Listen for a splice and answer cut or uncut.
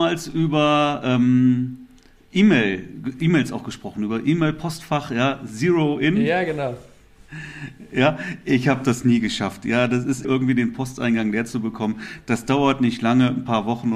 cut